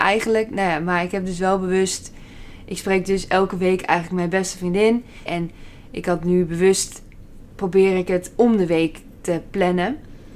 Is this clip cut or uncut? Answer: cut